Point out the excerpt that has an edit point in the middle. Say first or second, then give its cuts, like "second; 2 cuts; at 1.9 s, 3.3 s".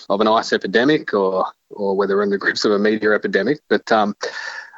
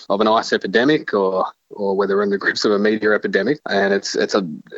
second; 1 cut; at 3.6 s